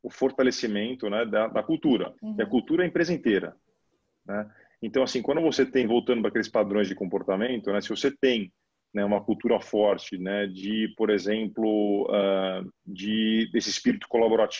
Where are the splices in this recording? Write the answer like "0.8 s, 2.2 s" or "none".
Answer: 2.2 s, 12.8 s